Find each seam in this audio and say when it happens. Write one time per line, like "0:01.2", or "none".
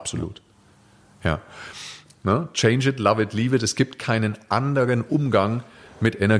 0:02.1